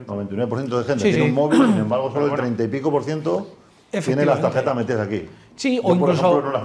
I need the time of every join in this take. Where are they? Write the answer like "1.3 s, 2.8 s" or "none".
none